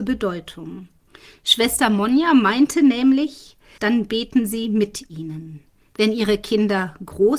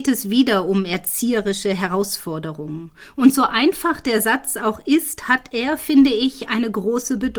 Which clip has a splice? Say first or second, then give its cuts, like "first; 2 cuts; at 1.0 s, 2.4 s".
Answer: first; 1 cut; at 3.8 s